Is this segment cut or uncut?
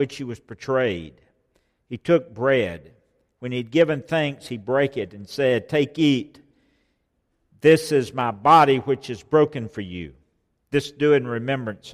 uncut